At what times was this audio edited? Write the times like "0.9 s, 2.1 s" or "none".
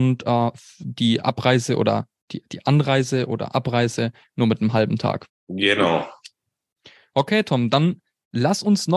5.3 s